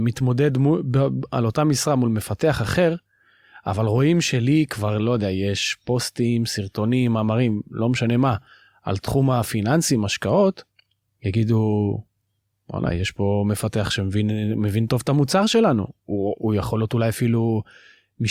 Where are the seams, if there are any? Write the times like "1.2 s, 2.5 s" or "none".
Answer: none